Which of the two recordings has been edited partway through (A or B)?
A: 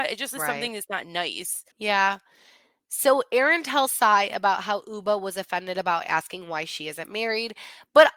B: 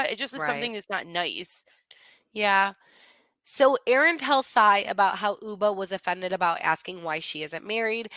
A